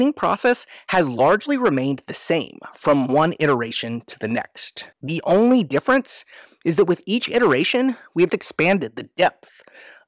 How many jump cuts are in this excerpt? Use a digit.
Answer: 2